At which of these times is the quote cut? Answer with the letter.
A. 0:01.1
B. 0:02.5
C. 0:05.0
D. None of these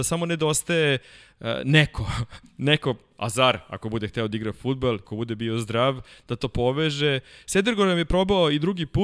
C